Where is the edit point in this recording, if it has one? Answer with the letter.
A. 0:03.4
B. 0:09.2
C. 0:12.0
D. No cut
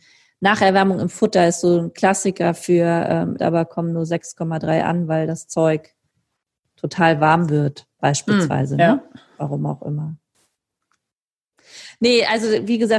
A